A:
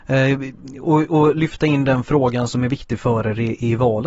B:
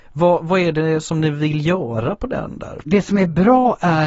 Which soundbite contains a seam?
B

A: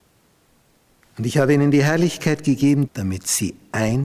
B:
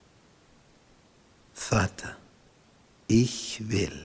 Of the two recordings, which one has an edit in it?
A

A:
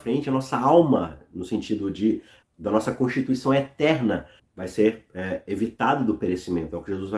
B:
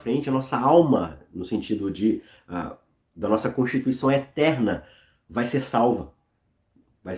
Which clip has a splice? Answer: A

